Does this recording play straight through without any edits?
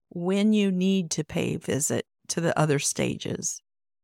yes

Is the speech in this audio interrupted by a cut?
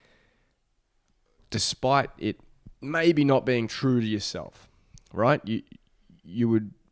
no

